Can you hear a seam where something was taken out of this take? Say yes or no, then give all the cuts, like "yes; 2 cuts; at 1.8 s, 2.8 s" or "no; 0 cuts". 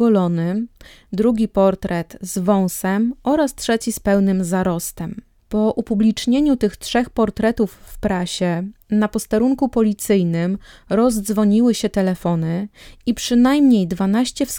no; 0 cuts